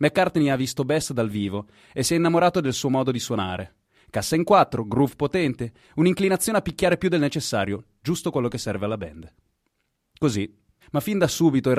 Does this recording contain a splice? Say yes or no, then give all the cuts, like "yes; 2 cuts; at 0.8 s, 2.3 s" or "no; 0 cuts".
yes; 1 cut; at 10.8 s